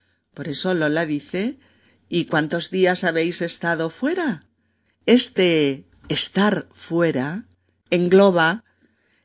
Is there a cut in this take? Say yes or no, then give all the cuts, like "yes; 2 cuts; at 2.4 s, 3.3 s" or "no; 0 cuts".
yes; 2 cuts; at 4.9 s, 7.8 s